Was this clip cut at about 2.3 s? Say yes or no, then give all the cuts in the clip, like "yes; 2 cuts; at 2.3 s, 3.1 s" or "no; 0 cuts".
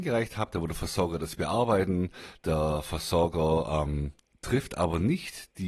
no; 0 cuts